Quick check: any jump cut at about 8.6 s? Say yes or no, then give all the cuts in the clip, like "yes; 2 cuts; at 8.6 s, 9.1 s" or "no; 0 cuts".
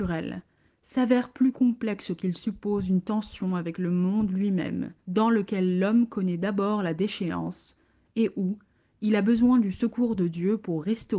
no; 1 cut; at 5.0 s